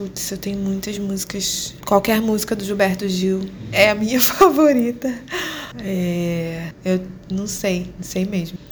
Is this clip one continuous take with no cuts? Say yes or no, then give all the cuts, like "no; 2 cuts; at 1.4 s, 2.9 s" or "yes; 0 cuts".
no; 1 cut; at 1.8 s